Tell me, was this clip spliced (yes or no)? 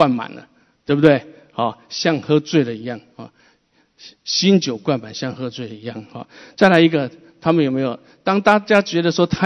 no